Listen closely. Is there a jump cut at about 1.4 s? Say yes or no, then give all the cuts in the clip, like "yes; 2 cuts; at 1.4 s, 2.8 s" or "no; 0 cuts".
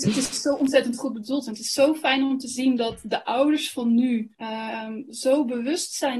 no; 1 cut; at 4.3 s